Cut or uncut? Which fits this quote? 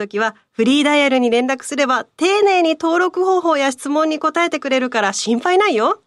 uncut